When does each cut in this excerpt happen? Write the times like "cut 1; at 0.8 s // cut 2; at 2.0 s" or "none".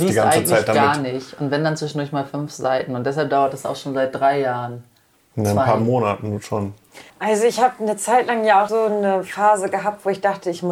cut 1; at 7.1 s // cut 2; at 8.7 s